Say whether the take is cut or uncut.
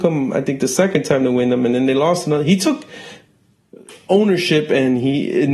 uncut